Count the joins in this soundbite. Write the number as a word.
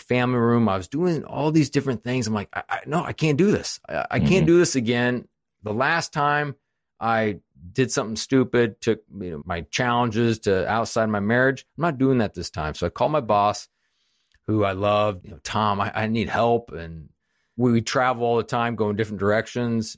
two